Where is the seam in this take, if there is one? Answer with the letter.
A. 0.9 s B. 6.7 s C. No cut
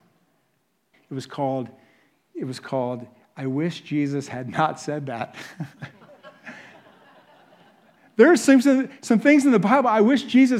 A